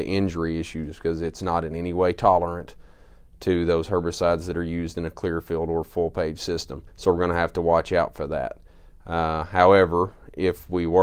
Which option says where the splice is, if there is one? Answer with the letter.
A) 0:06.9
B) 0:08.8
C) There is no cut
A